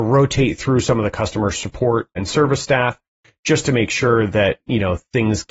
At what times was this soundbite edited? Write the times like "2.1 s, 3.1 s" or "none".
2.2 s